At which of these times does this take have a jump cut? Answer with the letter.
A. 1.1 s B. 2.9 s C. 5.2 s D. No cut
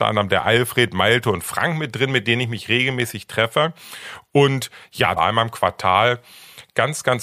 C